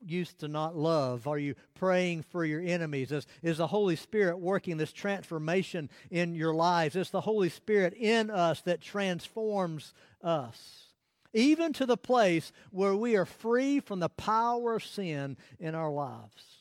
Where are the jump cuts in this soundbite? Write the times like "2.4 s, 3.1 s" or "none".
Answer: none